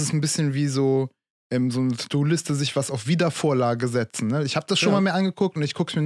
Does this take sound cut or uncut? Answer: uncut